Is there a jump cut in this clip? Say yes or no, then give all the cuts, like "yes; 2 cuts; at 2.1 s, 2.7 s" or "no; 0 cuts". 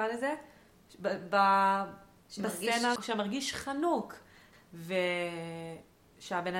yes; 2 cuts; at 3.0 s, 4.5 s